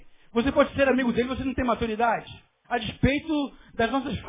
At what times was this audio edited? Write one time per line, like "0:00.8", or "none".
0:02.6

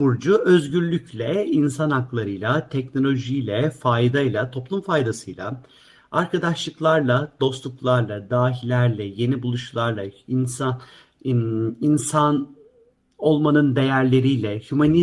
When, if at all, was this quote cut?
none

